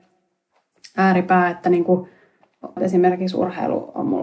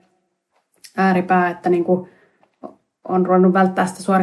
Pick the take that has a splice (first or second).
first